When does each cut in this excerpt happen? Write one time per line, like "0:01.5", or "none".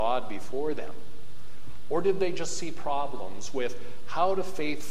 none